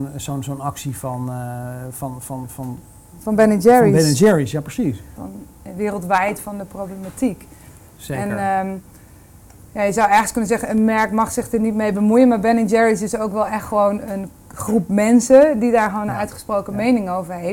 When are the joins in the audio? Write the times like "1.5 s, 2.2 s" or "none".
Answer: 5.2 s